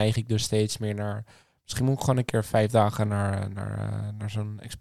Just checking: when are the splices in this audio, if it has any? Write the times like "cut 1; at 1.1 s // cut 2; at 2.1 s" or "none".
none